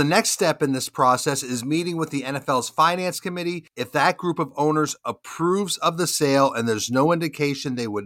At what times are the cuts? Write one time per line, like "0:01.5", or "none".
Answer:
none